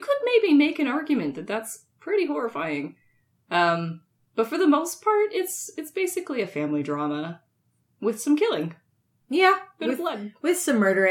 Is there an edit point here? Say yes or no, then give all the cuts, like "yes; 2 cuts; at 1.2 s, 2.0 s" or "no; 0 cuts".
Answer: no; 0 cuts